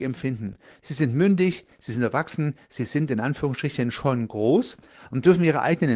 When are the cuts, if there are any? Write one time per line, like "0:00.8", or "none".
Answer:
none